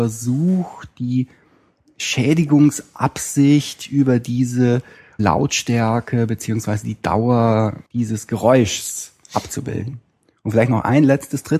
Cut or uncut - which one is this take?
cut